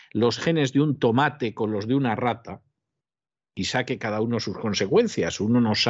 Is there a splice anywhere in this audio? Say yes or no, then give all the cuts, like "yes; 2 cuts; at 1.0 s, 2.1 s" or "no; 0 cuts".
no; 0 cuts